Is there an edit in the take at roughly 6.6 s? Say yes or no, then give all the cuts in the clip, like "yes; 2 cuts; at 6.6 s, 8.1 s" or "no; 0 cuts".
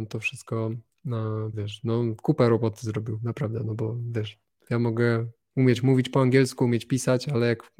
no; 1 cut; at 1.5 s